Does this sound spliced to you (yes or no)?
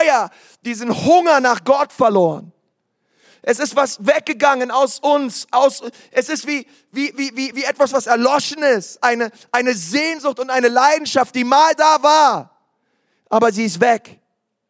yes